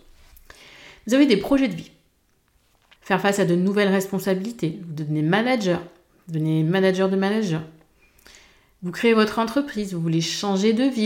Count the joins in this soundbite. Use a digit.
1